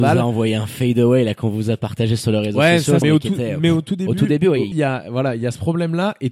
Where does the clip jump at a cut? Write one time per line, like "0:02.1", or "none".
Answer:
0:03.0
0:04.7